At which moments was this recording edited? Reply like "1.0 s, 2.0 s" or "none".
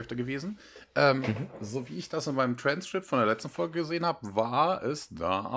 none